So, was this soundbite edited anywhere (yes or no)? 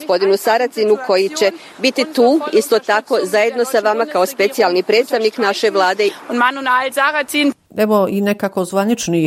yes